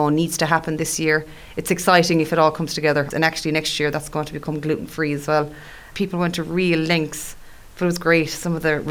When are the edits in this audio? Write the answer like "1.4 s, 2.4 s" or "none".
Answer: 3.1 s, 5.9 s